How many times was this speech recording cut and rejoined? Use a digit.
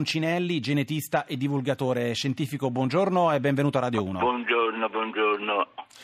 0